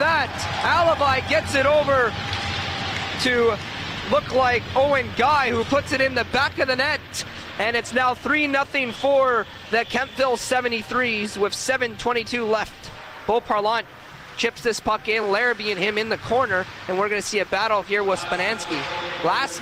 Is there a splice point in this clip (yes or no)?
no